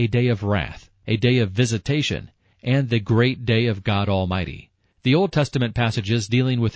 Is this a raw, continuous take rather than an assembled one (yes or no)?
no